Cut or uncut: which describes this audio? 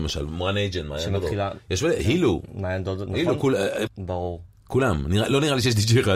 cut